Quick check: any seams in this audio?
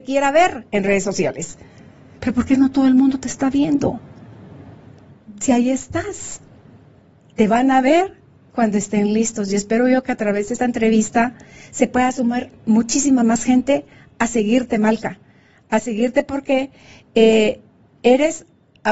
no; 0 cuts

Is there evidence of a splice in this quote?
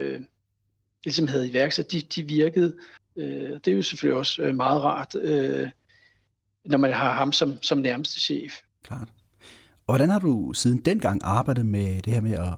yes; 2 cuts; at 3.0 s, 8.7 s

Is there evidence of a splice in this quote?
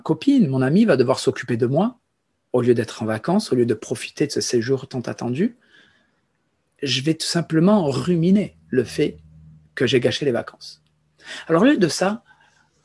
no; 0 cuts

